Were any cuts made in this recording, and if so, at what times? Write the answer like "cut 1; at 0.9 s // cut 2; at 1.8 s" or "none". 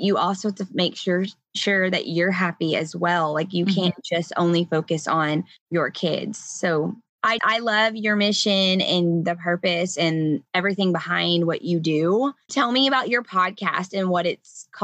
cut 1; at 7.4 s // cut 2; at 12.5 s